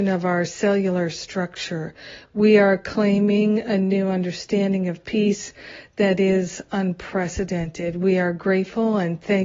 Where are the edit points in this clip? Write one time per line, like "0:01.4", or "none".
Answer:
none

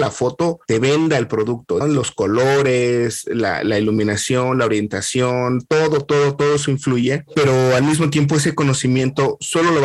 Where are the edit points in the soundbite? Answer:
0:01.8

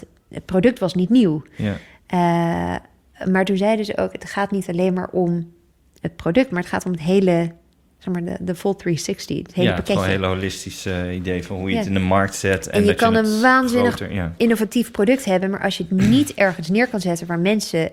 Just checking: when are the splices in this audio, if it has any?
none

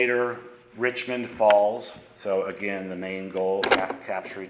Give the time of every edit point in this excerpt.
none

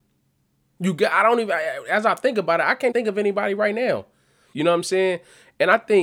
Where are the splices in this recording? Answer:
0:02.9
0:04.5

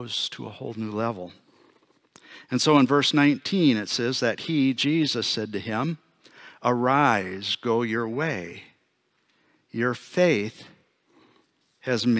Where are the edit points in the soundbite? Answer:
none

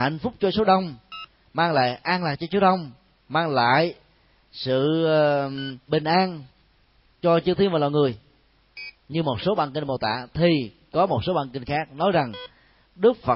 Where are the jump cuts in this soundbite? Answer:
0:05.9
0:09.0

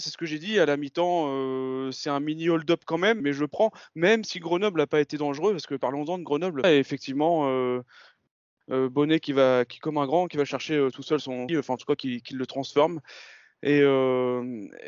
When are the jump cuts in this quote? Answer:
0:03.2
0:06.6
0:11.5

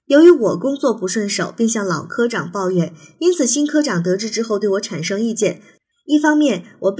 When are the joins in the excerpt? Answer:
0:05.9

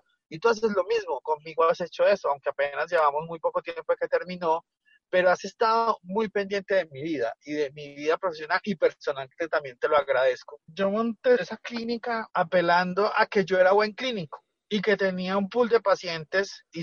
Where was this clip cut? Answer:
0:10.6

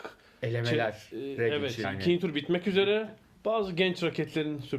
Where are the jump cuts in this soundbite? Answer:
0:01.8
0:03.4

